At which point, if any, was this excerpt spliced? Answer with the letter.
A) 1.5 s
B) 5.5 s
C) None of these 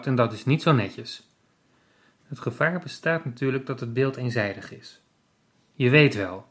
B